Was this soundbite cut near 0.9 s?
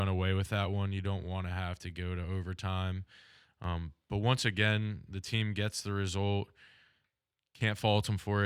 no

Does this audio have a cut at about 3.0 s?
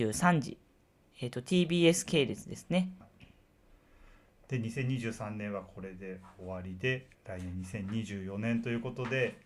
yes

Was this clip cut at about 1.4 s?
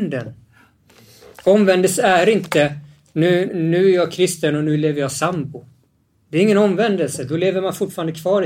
no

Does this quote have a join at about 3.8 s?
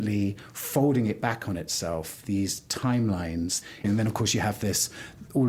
yes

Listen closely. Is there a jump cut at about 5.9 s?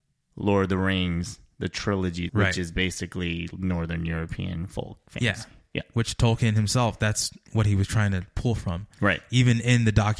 no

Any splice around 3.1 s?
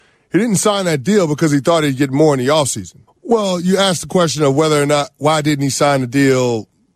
yes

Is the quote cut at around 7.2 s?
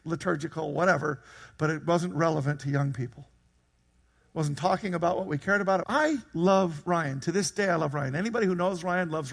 no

